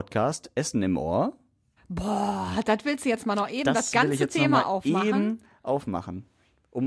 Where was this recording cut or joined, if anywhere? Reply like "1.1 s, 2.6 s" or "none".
1.8 s

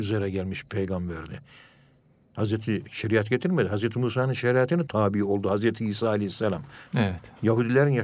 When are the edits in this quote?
4.9 s, 6.9 s

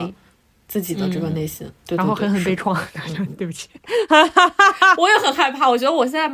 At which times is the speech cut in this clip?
none

